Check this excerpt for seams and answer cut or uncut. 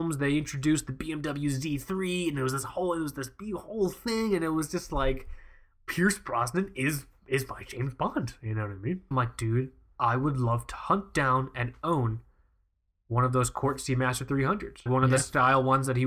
cut